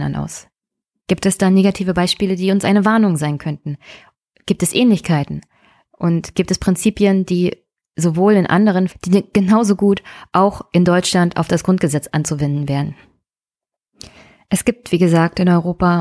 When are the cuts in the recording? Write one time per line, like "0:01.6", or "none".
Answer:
0:08.9